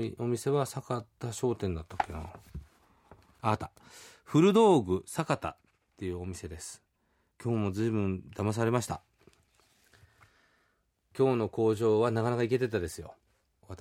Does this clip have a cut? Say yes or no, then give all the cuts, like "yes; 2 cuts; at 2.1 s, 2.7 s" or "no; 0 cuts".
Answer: no; 0 cuts